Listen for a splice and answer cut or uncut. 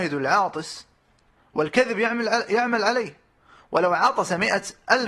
uncut